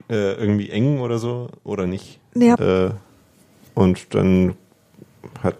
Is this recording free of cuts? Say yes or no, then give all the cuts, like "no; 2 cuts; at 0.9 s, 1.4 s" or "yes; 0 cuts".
no; 1 cut; at 2.6 s